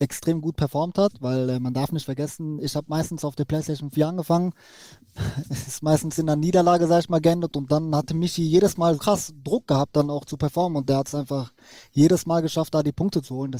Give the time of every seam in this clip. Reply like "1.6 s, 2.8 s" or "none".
9.0 s

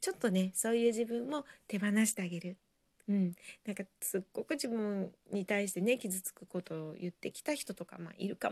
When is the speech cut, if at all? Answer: 3.0 s

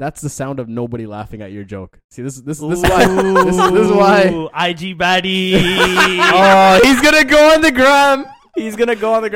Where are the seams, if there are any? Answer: none

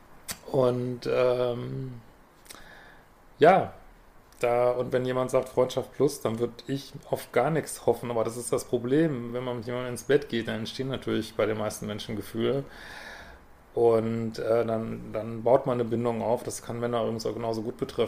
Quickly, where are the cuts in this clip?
none

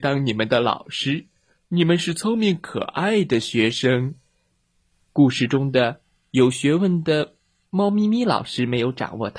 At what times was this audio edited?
4.9 s

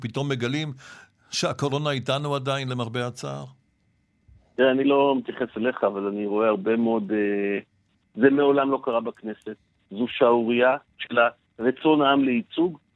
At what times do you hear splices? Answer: 8.0 s, 11.0 s

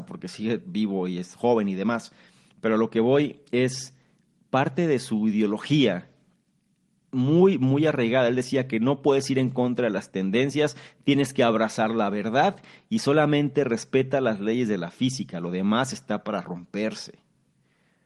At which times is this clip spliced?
none

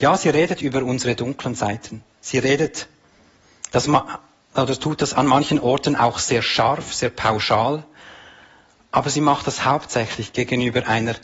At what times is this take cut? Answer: none

